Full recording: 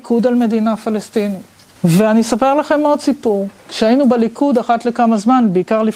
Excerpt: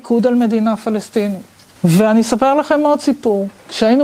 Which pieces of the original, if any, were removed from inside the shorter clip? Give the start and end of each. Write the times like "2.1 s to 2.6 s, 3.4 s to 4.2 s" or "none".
none